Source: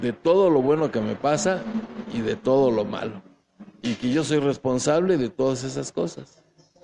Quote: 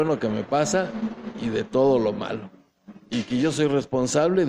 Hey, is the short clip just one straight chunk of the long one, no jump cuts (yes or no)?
yes